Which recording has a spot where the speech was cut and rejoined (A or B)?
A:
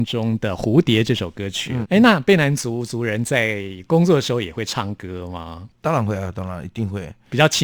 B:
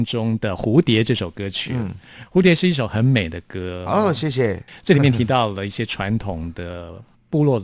A